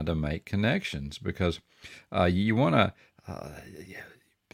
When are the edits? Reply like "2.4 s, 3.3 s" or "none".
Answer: none